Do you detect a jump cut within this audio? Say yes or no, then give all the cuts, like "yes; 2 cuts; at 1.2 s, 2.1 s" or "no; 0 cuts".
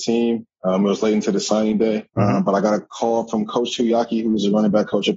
yes; 1 cut; at 2.1 s